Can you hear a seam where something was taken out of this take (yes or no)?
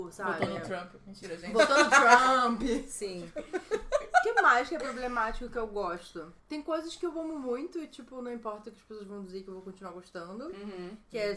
yes